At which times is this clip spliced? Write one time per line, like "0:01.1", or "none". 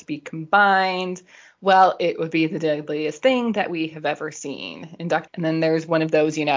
0:05.3

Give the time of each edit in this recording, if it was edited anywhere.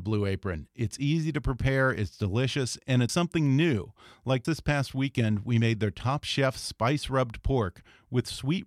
0:03.1
0:04.4

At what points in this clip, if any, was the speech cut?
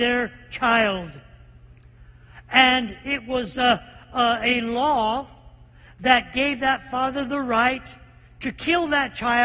none

